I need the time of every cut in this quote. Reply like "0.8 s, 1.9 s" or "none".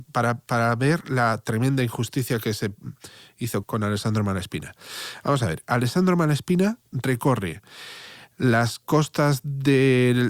3.6 s